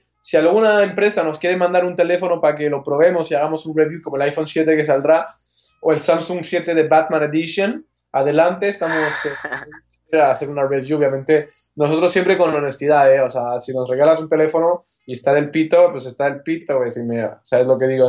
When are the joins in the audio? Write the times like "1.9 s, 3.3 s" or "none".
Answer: 10.1 s